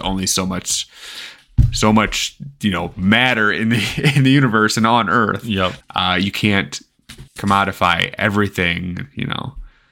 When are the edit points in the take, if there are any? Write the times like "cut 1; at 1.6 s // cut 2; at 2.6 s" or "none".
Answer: cut 1; at 5.8 s // cut 2; at 7.3 s